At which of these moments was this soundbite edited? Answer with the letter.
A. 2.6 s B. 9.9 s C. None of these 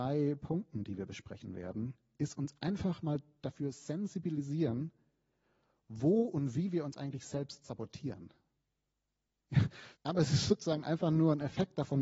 B